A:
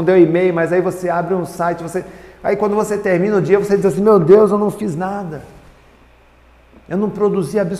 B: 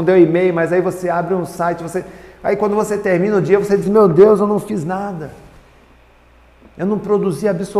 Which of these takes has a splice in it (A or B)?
B